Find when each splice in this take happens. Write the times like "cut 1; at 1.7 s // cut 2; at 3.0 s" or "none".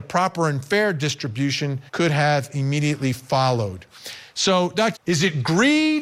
cut 1; at 1.9 s // cut 2; at 5.0 s